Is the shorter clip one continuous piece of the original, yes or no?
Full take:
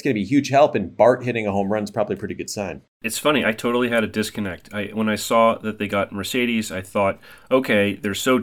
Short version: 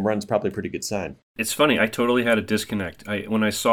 yes